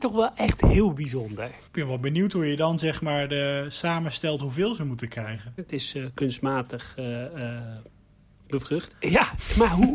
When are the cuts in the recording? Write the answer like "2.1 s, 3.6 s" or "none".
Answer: 1.7 s, 5.6 s, 8.9 s